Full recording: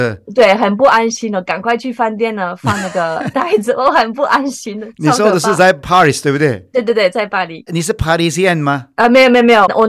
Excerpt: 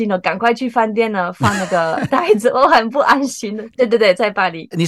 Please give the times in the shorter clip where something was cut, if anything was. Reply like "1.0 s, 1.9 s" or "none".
3.7 s